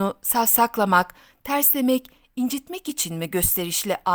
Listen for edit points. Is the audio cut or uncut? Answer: uncut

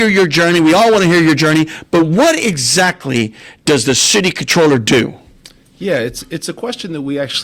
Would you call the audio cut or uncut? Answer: uncut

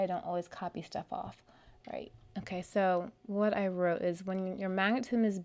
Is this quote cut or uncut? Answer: uncut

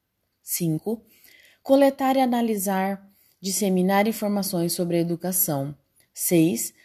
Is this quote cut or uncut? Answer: uncut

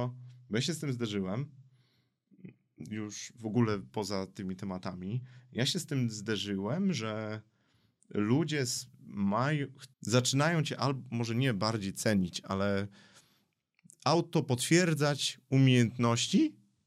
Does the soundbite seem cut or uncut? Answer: cut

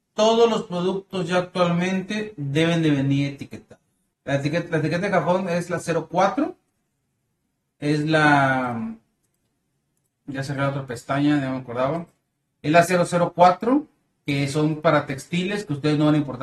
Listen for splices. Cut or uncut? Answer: cut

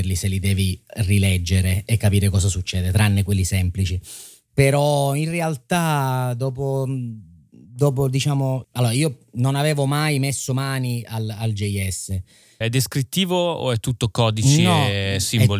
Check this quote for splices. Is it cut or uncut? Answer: cut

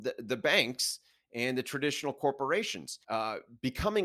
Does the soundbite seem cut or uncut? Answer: cut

